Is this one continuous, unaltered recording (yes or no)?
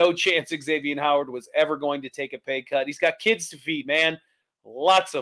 yes